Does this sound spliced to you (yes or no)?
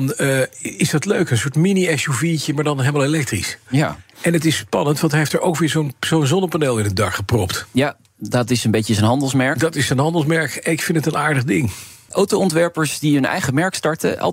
no